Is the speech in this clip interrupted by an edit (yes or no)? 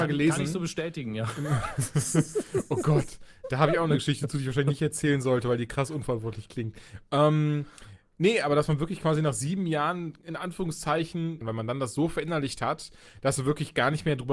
yes